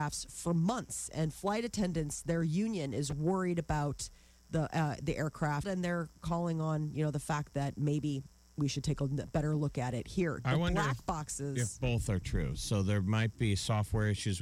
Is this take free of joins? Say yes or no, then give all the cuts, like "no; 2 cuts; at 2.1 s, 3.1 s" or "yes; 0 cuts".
no; 1 cut; at 5.6 s